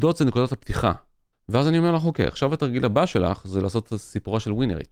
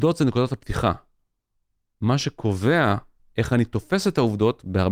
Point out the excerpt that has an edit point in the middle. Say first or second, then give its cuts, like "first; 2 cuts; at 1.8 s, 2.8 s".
first; 1 cut; at 1.3 s